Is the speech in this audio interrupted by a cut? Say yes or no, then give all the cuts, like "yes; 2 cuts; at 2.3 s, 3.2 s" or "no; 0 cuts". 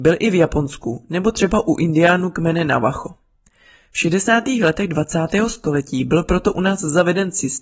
no; 0 cuts